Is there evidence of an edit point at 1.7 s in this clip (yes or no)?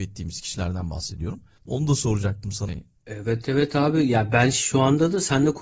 yes